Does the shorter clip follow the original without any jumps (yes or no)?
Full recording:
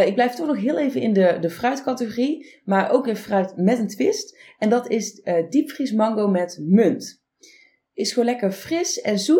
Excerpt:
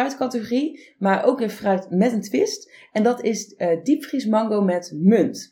yes